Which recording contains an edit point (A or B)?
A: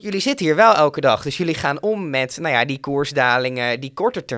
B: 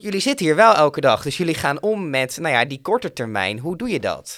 B